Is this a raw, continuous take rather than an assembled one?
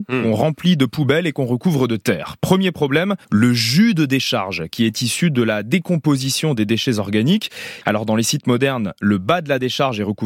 no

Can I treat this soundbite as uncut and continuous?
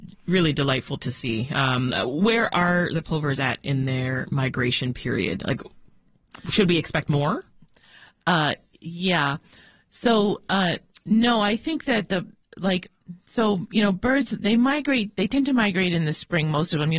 yes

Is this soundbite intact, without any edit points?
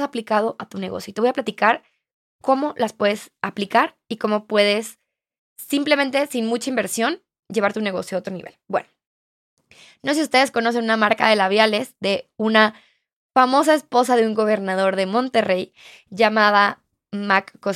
yes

